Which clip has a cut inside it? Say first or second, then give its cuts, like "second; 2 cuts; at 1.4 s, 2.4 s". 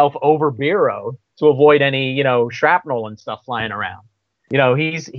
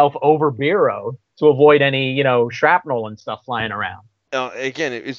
second; 1 cut; at 4.3 s